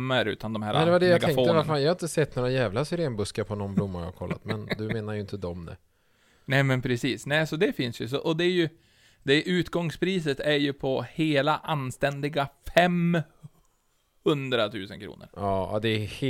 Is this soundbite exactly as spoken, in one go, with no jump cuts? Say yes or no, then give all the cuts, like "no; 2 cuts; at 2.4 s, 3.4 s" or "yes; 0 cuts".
yes; 0 cuts